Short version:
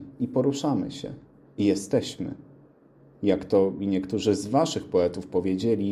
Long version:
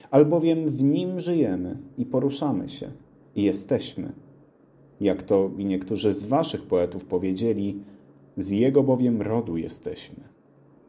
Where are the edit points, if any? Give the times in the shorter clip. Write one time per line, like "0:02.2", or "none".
none